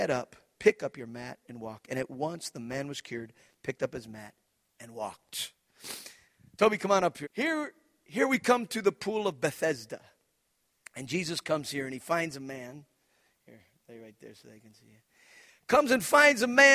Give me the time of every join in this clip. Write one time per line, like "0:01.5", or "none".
0:07.2

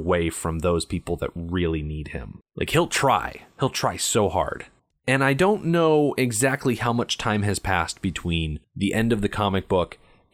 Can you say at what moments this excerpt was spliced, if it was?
0:04.9

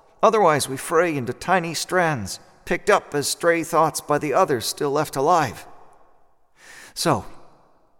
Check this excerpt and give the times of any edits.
none

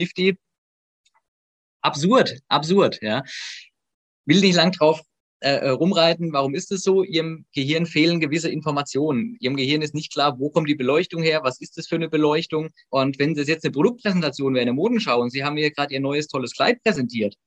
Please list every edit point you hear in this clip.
0:12.9

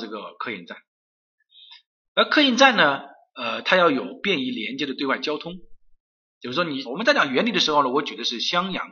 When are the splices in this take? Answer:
0:06.9

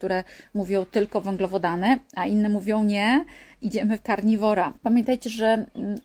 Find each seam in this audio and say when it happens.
0:04.8

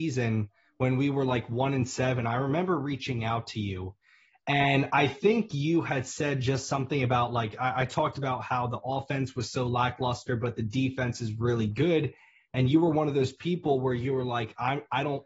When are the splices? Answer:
none

